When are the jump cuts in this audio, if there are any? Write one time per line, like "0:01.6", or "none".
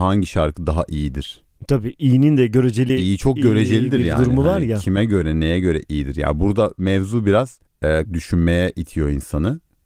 0:08.1